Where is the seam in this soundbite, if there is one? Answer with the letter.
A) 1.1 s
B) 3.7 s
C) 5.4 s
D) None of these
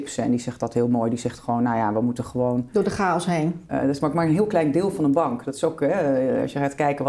B